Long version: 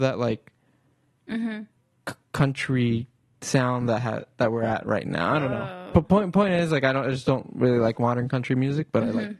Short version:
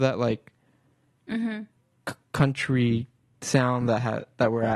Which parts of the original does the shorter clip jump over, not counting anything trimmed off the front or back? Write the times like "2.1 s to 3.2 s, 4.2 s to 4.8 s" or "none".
none